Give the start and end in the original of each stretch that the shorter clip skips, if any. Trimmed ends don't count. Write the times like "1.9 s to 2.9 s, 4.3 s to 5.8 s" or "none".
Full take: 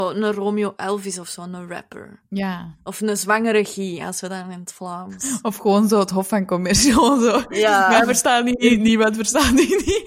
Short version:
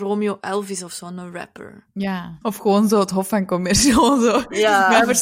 2.8 s to 5.4 s